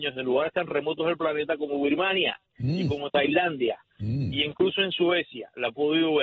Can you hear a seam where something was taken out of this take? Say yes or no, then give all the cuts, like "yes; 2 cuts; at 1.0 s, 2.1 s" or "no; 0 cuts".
no; 0 cuts